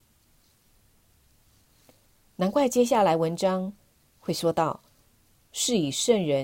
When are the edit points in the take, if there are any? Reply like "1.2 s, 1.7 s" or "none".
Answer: 5.4 s